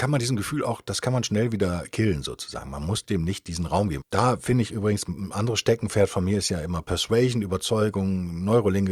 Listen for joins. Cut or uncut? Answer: cut